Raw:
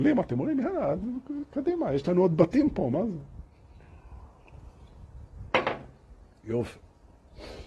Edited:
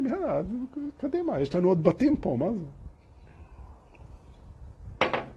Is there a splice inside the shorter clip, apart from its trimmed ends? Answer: no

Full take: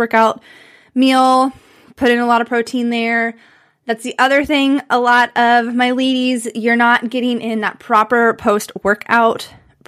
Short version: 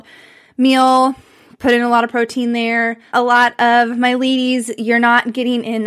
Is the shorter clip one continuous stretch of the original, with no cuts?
no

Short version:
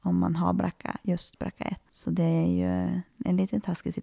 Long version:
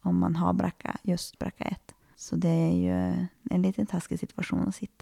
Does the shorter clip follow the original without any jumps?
no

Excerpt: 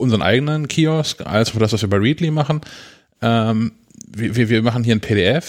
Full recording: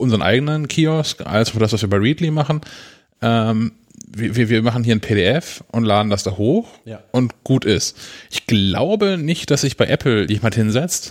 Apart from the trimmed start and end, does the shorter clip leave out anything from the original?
no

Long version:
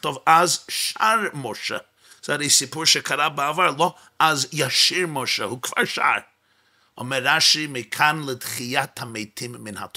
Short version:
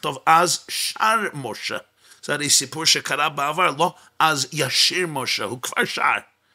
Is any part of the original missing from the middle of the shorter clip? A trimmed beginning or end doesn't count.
no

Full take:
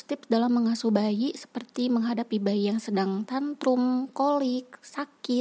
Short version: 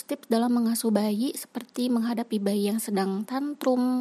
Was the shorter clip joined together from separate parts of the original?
no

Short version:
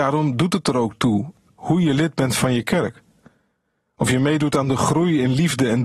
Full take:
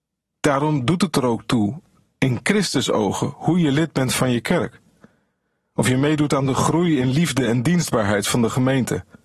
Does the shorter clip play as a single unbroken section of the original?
no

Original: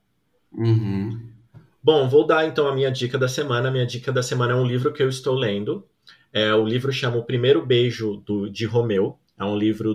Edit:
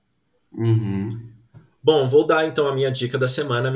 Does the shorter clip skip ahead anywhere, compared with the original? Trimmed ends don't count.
no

